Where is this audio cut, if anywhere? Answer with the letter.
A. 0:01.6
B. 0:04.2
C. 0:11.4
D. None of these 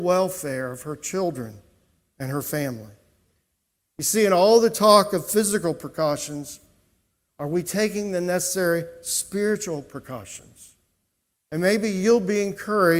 C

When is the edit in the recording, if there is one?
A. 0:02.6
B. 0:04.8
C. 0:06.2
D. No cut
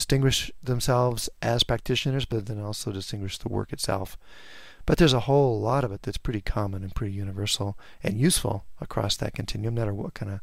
D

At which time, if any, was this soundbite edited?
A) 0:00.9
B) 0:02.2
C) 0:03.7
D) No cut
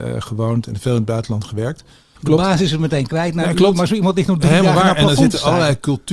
B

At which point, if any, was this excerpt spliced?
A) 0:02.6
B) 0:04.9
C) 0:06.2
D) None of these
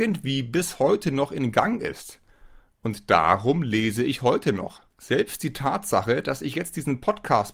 B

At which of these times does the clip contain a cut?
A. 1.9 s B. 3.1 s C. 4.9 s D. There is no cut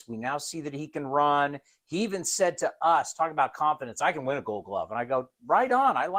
D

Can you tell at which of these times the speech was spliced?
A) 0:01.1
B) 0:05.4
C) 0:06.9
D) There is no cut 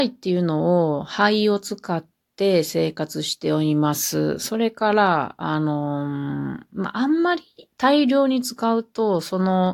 D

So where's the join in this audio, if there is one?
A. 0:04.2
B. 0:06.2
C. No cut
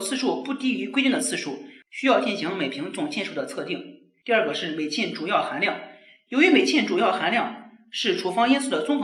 C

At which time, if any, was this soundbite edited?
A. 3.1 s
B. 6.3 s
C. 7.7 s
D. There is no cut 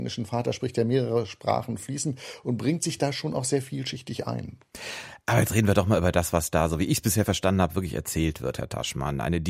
D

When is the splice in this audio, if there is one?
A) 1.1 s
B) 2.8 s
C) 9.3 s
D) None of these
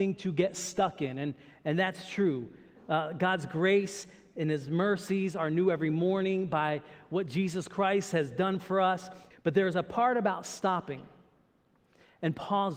C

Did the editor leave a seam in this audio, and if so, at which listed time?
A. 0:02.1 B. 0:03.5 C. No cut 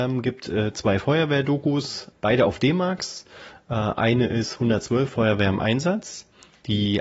A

